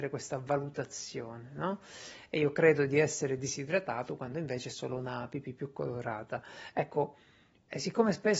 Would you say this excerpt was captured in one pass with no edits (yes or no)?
yes